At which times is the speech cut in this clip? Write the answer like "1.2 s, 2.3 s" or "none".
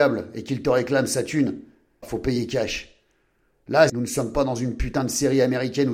2.0 s, 3.9 s